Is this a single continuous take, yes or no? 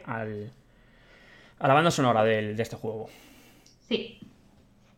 yes